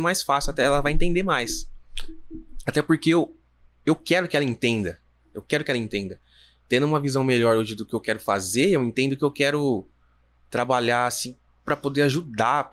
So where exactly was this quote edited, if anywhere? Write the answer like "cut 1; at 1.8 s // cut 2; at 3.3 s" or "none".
none